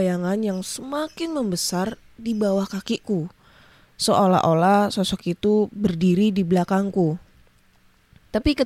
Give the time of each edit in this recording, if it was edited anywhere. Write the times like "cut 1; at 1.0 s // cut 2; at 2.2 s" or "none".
none